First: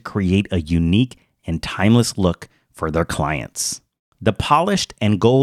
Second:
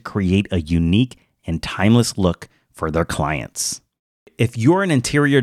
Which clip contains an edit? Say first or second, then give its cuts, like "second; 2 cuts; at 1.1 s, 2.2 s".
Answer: first; 1 cut; at 4.1 s